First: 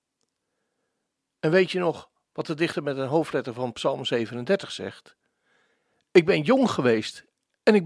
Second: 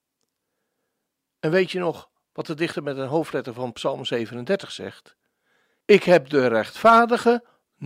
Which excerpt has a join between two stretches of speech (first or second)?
second